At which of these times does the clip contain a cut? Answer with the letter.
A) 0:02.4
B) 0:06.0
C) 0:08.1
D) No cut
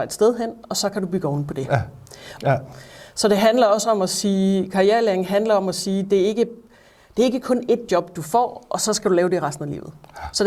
A